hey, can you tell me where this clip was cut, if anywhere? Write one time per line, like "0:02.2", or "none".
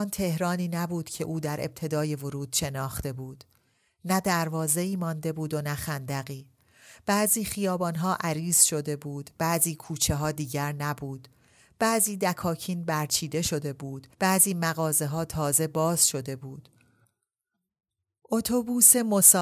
0:14.1